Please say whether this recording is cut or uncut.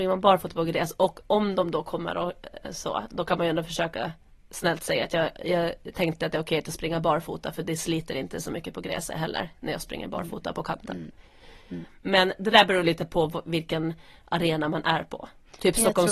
uncut